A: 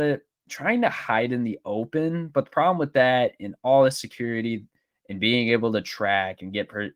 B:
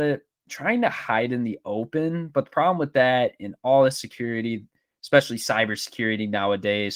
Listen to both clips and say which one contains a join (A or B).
A